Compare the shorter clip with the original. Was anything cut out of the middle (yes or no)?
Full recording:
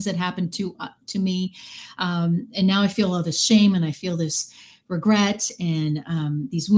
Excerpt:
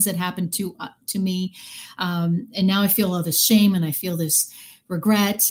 no